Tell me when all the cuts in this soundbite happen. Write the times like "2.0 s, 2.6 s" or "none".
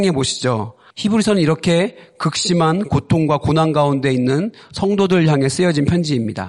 0.9 s